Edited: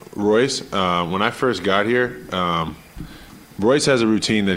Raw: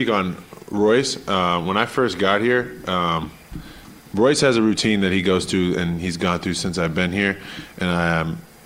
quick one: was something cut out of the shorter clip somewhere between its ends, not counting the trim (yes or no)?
no